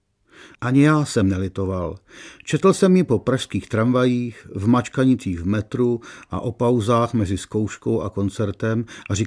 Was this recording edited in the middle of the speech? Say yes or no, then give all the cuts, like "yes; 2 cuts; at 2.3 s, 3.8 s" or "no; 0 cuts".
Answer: no; 0 cuts